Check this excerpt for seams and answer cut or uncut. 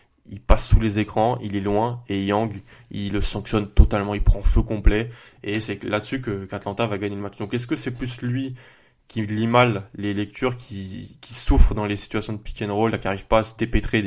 uncut